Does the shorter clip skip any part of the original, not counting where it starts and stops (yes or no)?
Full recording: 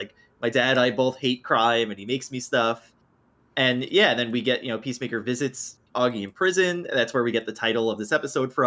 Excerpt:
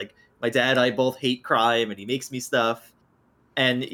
no